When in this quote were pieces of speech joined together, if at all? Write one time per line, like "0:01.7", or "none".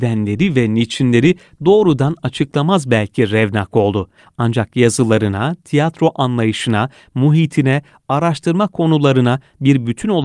none